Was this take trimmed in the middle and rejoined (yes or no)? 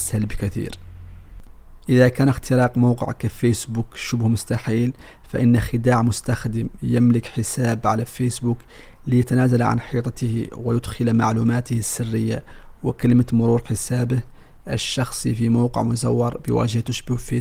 no